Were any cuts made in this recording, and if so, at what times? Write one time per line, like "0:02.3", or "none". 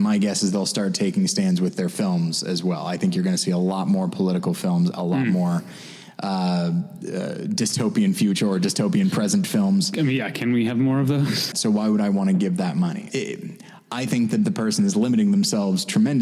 0:11.5
0:13.1